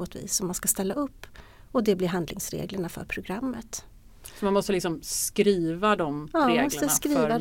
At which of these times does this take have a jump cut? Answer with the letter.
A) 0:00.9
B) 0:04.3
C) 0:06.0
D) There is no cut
D